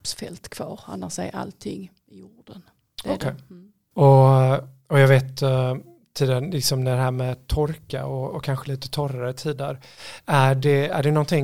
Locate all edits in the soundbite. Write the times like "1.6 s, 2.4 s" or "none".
3.9 s